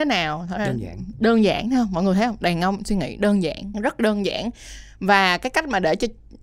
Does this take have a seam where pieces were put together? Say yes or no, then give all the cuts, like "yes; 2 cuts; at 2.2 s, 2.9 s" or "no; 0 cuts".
yes; 1 cut; at 3.7 s